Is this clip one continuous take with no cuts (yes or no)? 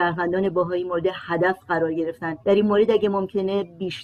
no